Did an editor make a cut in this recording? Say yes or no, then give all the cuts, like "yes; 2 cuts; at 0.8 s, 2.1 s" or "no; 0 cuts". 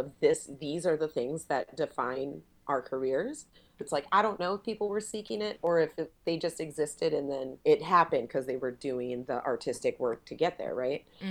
yes; 2 cuts; at 3.8 s, 7.6 s